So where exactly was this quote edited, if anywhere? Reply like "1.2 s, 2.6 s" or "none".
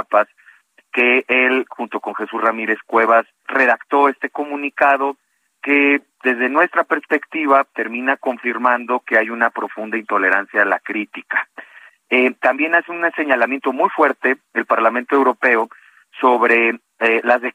3.4 s, 11.9 s

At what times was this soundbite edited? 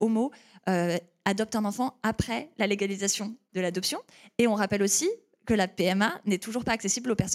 none

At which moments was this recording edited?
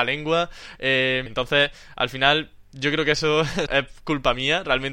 1.3 s, 3.7 s

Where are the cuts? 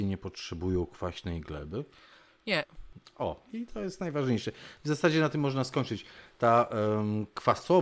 none

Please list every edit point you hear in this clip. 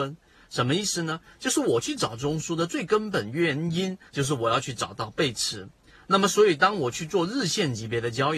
4.1 s

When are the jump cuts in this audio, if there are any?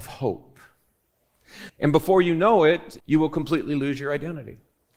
1.7 s, 3.0 s

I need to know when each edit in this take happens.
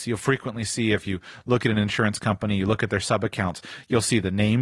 none

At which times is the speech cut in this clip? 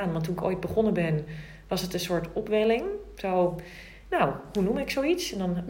none

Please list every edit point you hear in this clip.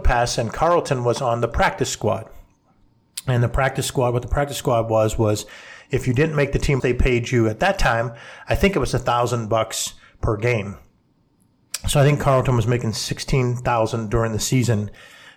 6.8 s

